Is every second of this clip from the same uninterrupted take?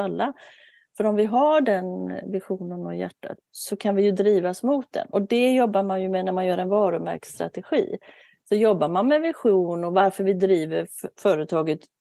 no; 1 cut; at 3.4 s

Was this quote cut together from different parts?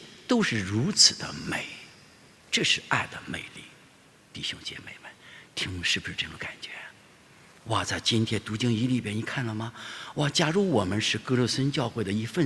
no; 0 cuts

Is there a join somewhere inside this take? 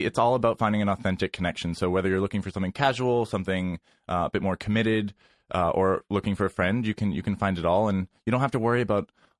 no; 0 cuts

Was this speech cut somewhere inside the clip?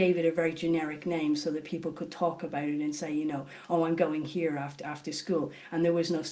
no; 0 cuts

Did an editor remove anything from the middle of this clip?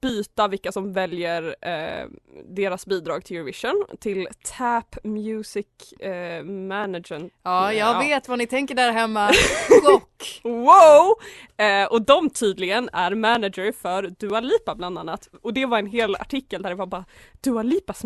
no; 0 cuts

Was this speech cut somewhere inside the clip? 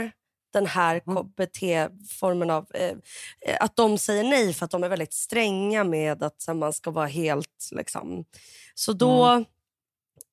no; 0 cuts

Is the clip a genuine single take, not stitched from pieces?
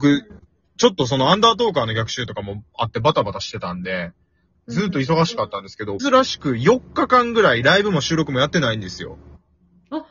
no; 1 cut; at 6.0 s

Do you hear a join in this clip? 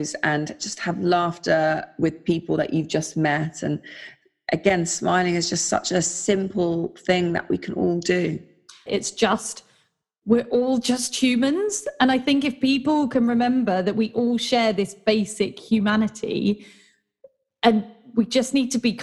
yes; 1 cut; at 8.9 s

